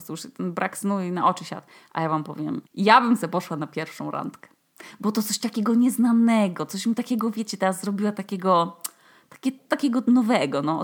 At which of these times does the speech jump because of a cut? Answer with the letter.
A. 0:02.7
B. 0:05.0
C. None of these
A